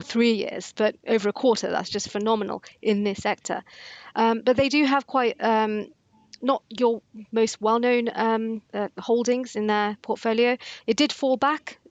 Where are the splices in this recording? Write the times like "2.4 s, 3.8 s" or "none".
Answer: 8.6 s, 10.8 s